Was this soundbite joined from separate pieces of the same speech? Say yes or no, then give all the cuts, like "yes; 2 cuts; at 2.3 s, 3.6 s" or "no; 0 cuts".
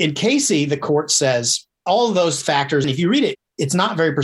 yes; 1 cut; at 2.8 s